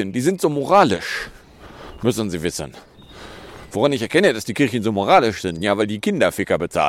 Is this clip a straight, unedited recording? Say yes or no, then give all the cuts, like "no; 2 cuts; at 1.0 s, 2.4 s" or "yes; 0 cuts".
yes; 0 cuts